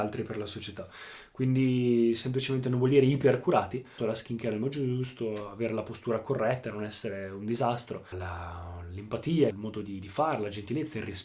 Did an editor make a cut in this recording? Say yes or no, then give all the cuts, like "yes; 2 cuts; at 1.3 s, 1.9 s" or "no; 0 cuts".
yes; 3 cuts; at 4.0 s, 8.1 s, 9.5 s